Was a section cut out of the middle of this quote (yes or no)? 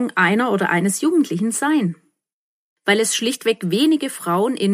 yes